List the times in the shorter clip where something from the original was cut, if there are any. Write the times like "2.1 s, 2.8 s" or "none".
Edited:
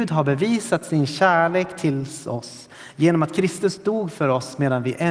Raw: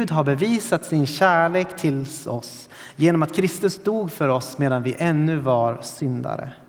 none